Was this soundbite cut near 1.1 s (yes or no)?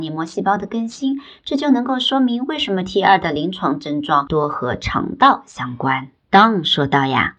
no